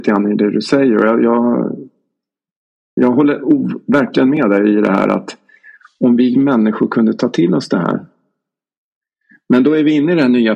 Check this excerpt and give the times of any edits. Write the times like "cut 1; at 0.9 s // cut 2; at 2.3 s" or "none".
cut 1; at 3.0 s

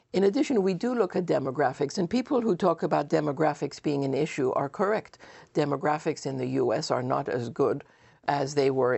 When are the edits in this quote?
none

